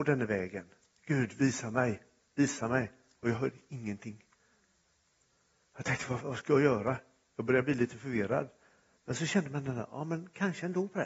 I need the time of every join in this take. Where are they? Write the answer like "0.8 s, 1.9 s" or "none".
6.2 s

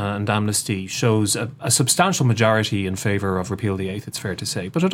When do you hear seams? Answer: none

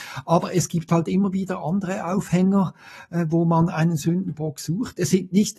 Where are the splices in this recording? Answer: none

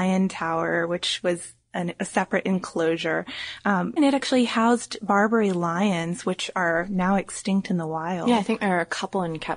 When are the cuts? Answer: 4.0 s

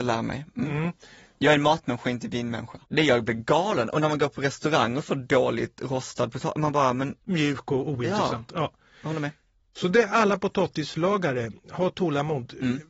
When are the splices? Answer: 2.8 s

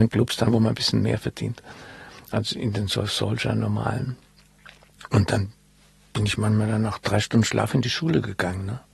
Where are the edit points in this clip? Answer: none

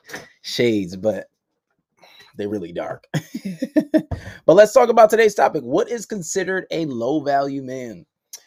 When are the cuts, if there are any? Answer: none

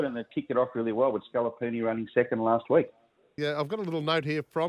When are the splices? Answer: 3.4 s

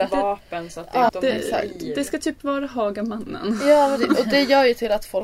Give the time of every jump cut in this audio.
1.1 s

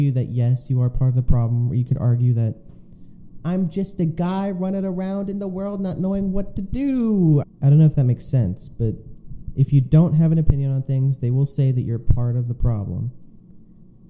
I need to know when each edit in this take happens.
7.4 s

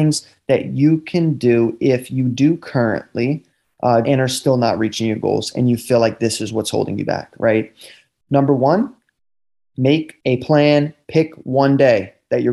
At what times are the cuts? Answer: 4.0 s

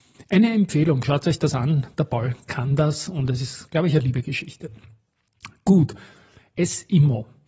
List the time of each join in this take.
none

